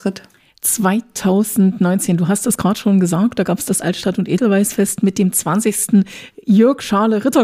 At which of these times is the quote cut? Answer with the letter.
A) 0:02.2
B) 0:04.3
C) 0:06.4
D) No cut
D